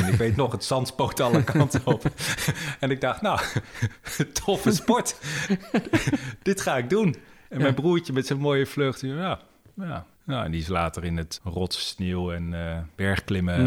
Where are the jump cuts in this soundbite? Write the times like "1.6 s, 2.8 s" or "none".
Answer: 10.1 s, 11.4 s